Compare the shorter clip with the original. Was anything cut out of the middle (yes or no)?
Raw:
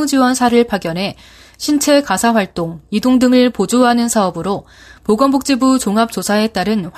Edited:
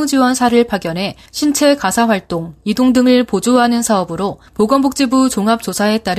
yes